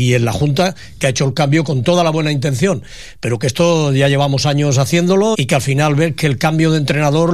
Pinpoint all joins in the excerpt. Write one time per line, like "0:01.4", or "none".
0:05.3